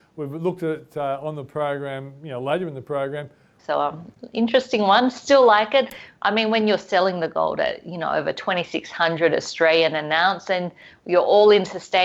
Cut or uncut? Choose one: cut